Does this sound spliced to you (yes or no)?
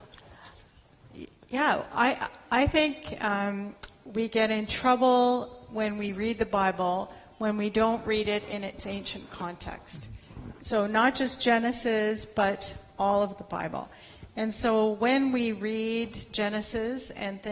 no